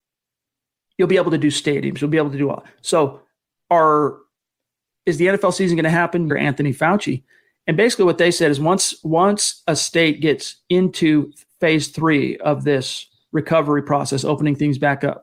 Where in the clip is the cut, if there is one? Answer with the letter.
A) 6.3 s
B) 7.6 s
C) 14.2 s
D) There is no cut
A